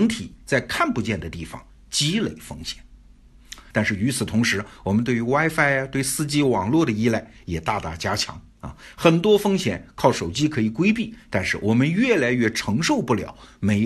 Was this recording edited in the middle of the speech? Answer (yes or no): yes